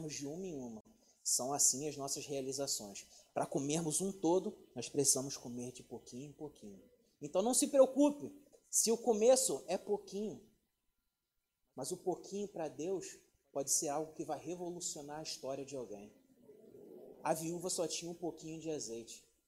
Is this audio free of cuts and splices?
yes; 0 cuts

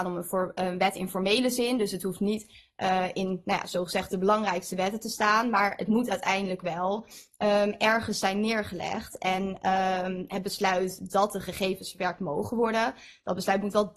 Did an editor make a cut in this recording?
no; 0 cuts

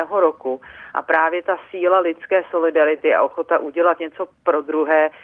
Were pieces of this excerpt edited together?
no; 0 cuts

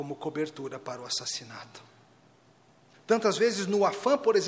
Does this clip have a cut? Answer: yes; 1 cut; at 2.9 s

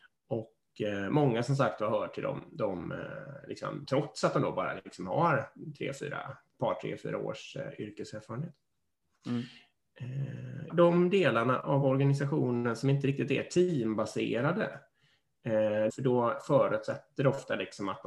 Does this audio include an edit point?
yes; 3 cuts; at 3.9 s, 10.7 s, 15.9 s

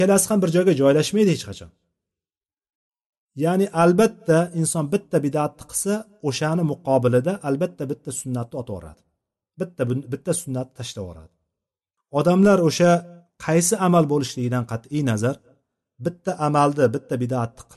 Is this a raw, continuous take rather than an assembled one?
yes; 0 cuts

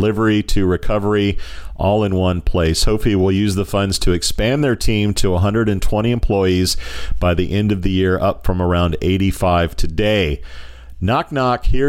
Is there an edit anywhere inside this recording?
no; 0 cuts

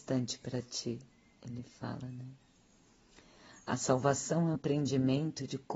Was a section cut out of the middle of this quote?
yes; 1 cut; at 4.5 s

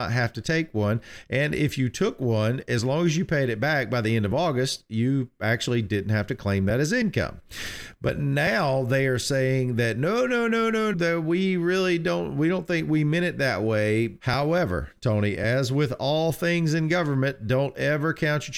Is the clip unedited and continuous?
no; 2 cuts; at 10.9 s, 14.2 s

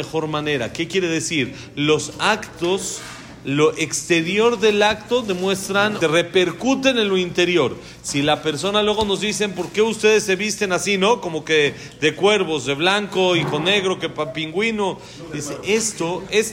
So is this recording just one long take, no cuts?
no; 1 cut; at 6.0 s

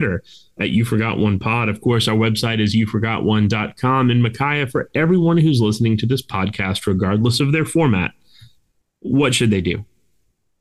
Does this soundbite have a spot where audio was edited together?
no; 0 cuts

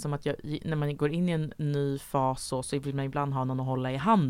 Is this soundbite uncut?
yes; 0 cuts

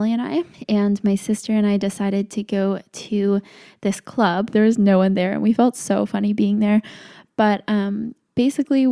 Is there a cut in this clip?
yes; 1 cut; at 4.5 s

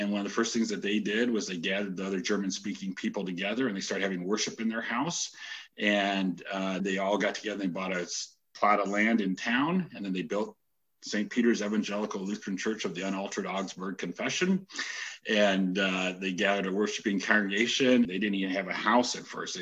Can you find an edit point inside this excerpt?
yes; 2 cuts; at 6.8 s, 18.0 s

